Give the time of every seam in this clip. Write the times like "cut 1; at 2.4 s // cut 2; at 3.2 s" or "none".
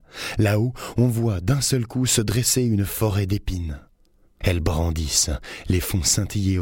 cut 1; at 4.4 s